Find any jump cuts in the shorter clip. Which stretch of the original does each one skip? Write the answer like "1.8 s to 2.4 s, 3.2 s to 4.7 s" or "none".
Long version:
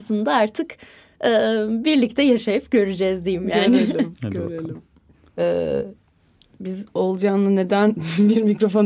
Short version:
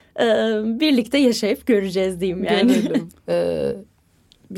4.2 s to 5.2 s